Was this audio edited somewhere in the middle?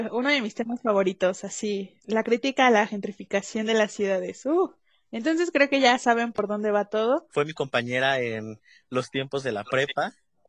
yes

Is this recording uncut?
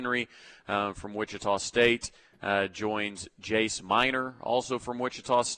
yes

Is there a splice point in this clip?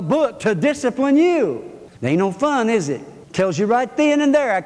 yes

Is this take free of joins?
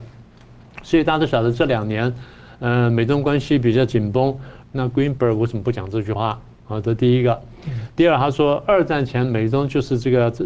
no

